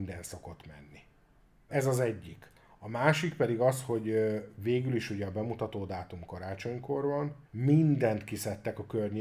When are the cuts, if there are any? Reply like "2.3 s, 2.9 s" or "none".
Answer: 1.7 s, 7.5 s